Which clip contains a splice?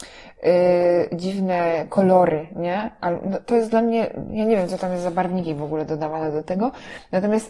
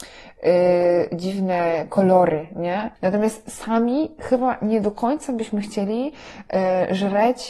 second; 1 cut; at 3.0 s

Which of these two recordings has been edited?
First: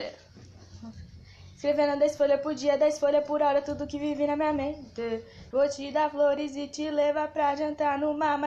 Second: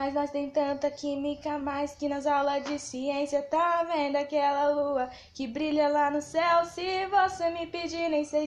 first; 1 cut; at 5.5 s

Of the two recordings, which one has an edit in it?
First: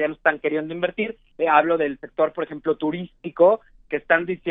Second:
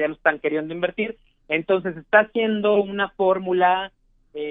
first; 1 cut; at 1.3 s

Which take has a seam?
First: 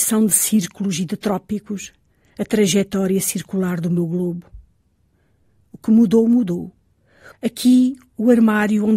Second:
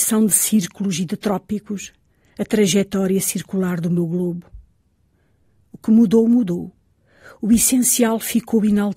first; 1 cut; at 7.3 s

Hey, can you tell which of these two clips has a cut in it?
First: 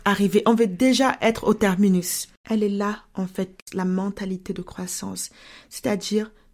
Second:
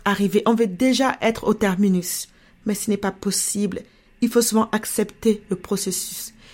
first; 1 cut; at 2.4 s

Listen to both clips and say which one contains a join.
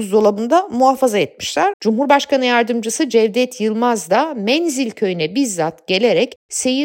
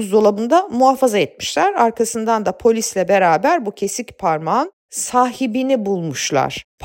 first; 1 cut; at 1.7 s

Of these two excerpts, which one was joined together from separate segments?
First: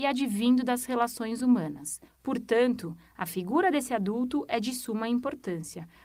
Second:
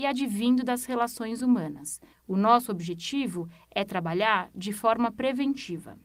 first; 1 cut; at 2.1 s

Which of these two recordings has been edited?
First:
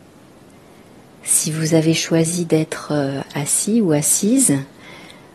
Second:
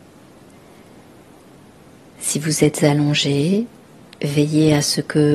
first; 1 cut; at 1.0 s

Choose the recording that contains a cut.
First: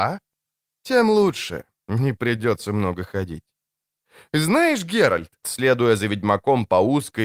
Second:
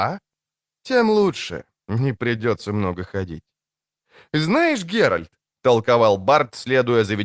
first; 1 cut; at 5.4 s

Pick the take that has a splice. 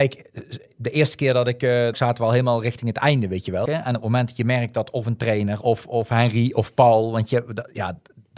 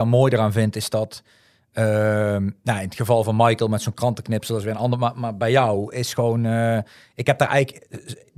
first; 3 cuts; at 1.9 s, 3.7 s, 5.6 s

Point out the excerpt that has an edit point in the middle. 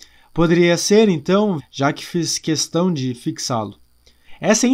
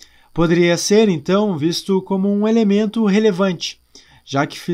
first; 1 cut; at 1.6 s

